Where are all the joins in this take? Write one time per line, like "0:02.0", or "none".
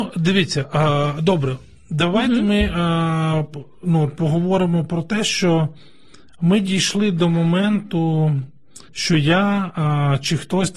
0:08.9